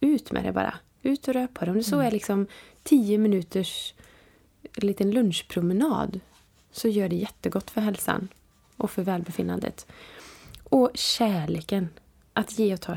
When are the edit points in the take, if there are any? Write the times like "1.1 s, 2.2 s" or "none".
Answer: none